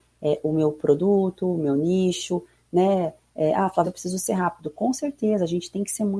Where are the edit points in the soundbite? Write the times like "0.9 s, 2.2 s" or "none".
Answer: 3.8 s